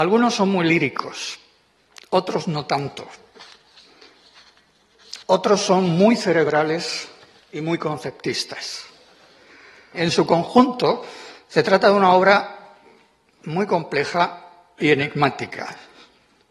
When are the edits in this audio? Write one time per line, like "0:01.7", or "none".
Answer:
0:05.2